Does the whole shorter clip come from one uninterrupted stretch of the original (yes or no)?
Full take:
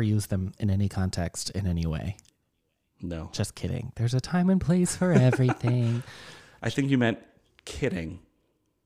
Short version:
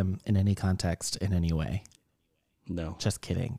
yes